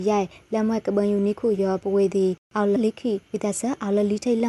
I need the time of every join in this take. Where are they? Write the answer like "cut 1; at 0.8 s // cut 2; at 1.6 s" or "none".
cut 1; at 2.8 s